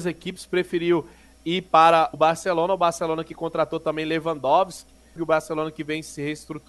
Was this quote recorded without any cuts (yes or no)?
no